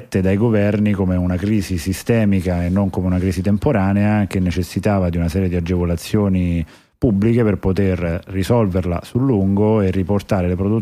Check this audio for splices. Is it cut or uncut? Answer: uncut